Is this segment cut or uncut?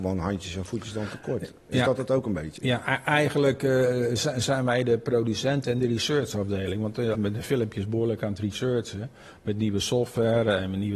cut